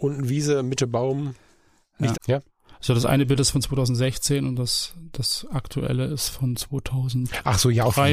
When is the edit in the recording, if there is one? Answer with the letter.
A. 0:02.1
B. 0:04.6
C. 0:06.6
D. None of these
A